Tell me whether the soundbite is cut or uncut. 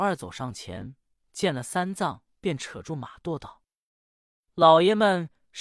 uncut